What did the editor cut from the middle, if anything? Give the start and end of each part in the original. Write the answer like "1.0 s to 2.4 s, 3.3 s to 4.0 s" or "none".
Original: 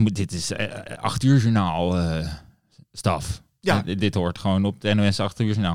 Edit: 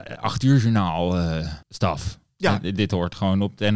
2.4 s to 2.9 s